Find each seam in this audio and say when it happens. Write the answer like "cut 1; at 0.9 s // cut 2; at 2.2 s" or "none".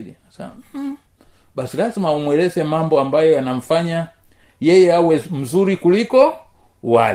none